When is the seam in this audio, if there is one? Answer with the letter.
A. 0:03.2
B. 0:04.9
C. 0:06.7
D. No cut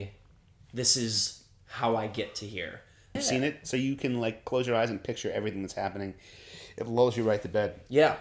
A